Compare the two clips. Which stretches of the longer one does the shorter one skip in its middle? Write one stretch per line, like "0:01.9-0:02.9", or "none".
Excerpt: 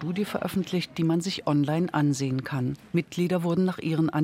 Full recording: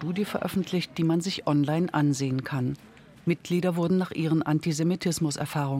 0:02.9-0:03.2